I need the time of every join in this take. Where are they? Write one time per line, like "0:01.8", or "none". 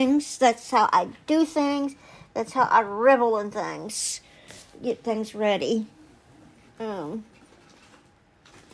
none